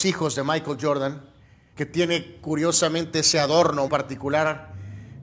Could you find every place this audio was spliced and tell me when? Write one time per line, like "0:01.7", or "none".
0:01.7
0:03.9